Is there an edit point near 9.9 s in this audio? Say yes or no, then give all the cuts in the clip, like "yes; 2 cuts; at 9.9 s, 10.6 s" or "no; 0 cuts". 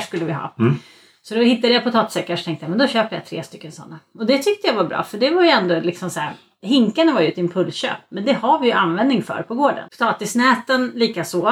yes; 1 cut; at 9.9 s